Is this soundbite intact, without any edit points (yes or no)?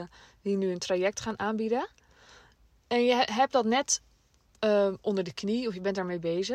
yes